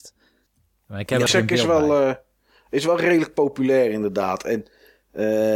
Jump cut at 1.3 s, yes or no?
yes